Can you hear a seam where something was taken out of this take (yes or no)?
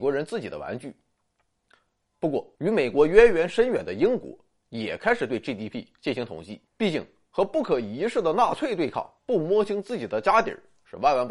yes